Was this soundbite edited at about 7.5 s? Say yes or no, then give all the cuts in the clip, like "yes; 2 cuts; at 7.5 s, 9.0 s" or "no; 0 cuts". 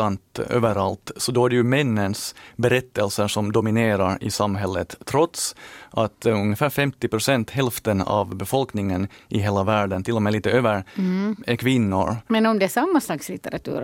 no; 1 cut; at 12.3 s